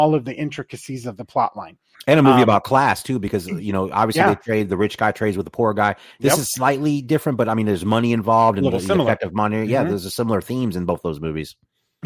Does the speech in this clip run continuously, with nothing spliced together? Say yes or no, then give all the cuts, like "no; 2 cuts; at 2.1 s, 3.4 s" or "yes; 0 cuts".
yes; 0 cuts